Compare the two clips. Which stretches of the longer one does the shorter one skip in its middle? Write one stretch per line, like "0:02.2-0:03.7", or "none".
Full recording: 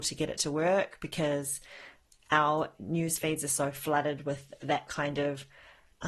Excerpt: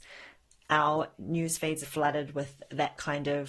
0:03.4-0:03.7